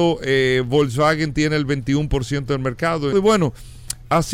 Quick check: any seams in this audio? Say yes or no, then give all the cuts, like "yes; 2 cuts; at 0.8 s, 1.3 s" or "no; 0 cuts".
yes; 1 cut; at 3.1 s